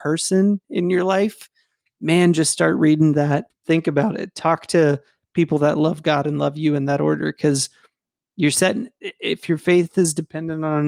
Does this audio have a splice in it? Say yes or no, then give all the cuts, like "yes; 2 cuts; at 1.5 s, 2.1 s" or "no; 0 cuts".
yes; 1 cut; at 3.5 s